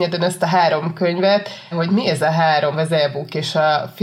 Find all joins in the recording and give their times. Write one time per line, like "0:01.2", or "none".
0:01.7
0:02.7